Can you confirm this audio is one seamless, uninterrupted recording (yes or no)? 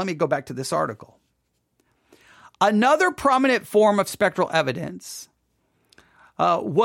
yes